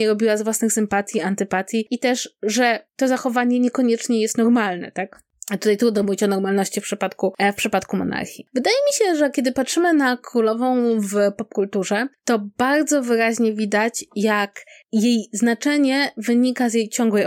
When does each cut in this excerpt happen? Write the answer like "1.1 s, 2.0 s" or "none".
none